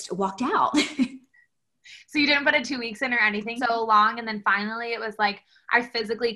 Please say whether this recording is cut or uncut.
cut